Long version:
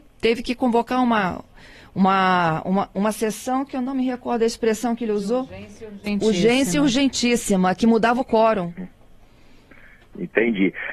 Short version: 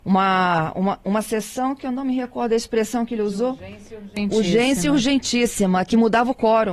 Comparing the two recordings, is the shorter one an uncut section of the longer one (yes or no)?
yes